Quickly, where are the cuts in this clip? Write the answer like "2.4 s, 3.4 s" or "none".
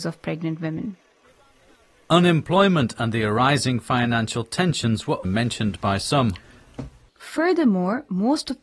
5.2 s, 7.1 s